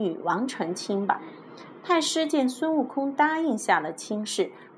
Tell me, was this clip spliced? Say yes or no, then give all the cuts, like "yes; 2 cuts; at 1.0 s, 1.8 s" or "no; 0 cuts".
no; 0 cuts